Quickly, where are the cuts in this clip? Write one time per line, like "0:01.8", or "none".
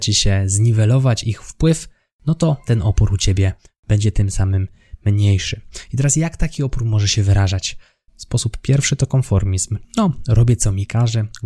0:08.1
0:09.8